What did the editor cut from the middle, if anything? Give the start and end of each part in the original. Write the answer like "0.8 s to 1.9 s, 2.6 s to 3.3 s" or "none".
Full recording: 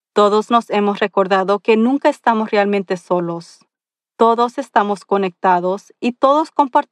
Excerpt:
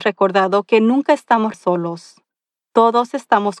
2.5 s to 3.0 s